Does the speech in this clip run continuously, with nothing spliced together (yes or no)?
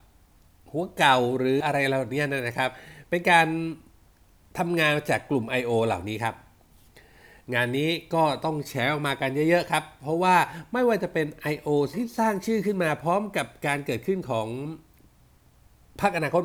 no